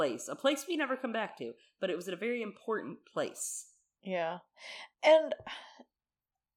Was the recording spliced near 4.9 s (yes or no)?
yes